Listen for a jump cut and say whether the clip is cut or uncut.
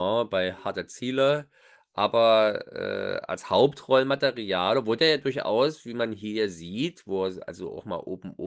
uncut